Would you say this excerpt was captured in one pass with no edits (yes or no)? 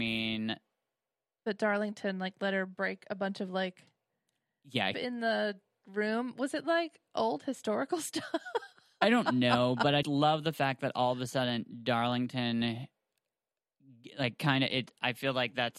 no